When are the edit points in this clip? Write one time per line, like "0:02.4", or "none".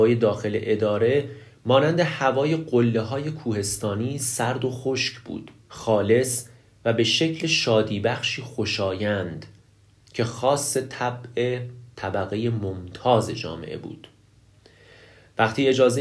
0:05.6